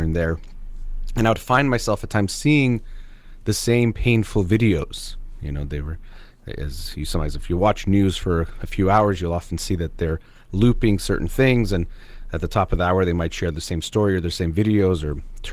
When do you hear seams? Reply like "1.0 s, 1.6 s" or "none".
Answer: none